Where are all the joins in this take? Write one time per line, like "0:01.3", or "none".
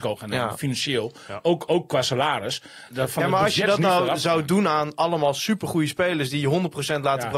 0:02.9